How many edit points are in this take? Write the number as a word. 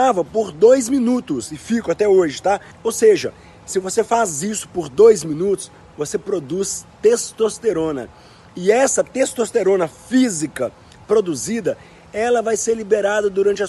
one